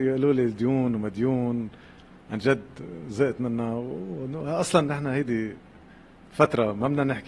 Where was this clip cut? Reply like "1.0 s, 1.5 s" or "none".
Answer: none